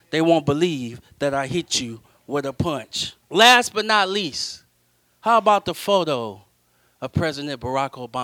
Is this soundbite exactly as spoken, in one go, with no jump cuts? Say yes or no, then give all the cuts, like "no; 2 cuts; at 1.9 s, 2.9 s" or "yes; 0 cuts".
no; 1 cut; at 3.3 s